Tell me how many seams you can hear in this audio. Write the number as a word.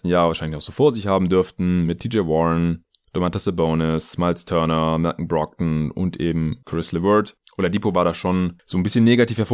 zero